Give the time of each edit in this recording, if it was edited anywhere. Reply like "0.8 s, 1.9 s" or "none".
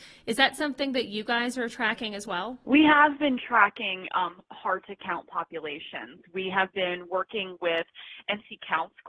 none